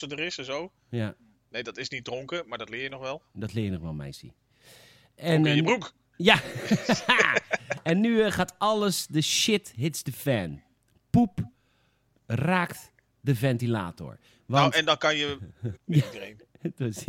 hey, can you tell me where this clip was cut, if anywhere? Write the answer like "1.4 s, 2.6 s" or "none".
15.8 s